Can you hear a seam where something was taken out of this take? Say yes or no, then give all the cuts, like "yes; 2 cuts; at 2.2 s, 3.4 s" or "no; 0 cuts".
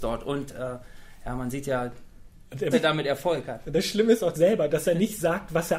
yes; 2 cuts; at 2.7 s, 4.3 s